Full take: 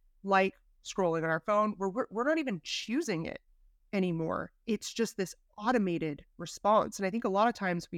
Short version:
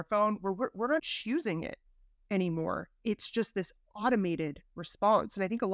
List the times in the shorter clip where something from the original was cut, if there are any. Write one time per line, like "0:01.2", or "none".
0:01.0